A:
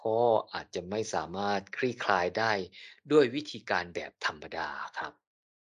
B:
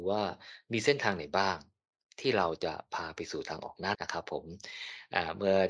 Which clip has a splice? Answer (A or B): B